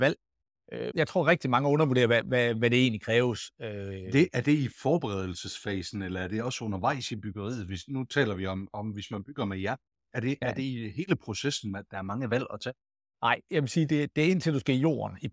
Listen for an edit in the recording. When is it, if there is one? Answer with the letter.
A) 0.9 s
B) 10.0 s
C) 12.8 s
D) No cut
A